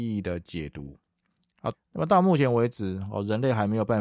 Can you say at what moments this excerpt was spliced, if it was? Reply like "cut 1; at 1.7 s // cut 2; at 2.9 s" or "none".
cut 1; at 1.7 s